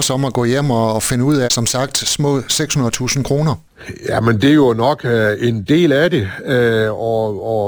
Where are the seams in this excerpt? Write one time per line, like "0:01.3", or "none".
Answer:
0:01.4